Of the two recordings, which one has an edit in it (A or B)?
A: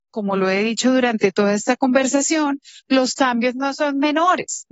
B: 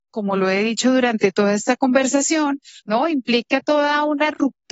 B